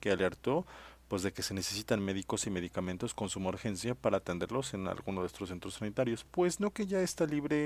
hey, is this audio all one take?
yes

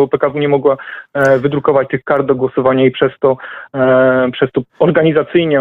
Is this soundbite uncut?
no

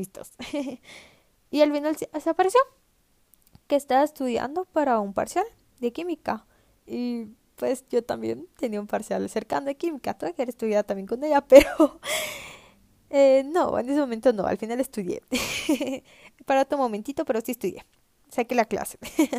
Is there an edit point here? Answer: no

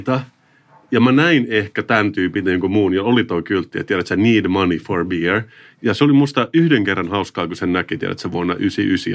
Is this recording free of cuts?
yes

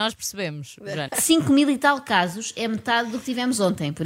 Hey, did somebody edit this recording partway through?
yes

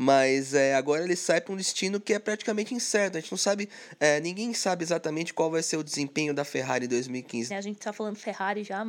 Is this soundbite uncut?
no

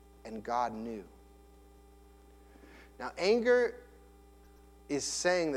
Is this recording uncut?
yes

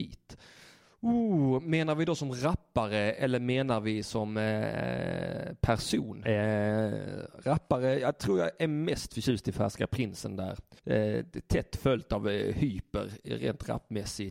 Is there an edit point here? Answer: yes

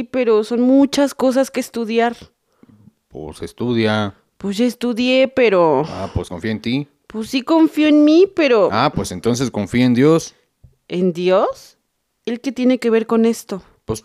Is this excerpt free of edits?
no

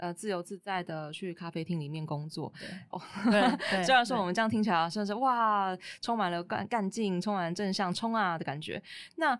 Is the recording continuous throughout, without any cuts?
no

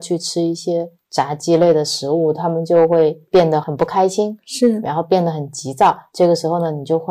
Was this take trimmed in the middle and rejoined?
no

